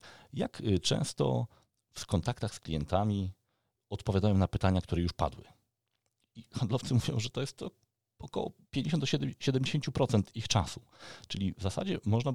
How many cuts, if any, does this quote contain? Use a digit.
1